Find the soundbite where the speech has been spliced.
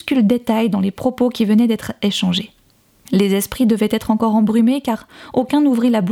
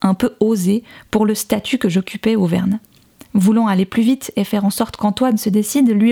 first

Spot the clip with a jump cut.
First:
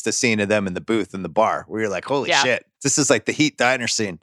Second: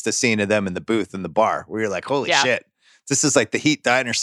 first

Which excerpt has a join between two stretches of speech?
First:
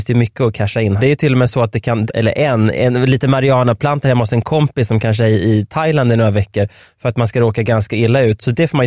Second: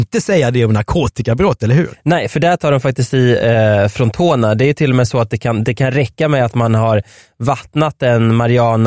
first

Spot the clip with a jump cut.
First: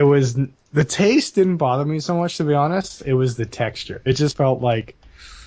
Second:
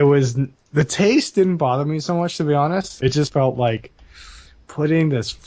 second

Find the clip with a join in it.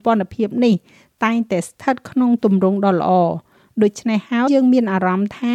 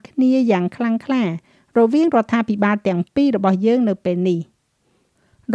first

